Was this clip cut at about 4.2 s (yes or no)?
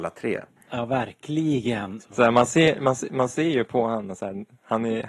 no